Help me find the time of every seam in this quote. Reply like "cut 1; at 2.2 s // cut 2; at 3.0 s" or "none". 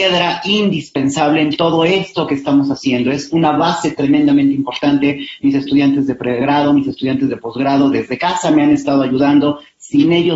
none